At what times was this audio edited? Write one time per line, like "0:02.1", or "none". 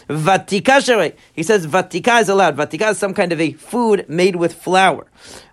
none